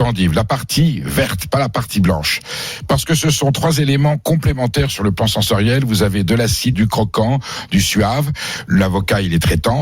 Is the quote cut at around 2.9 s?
no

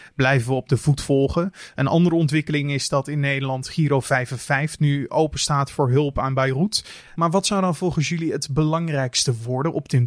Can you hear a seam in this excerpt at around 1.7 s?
no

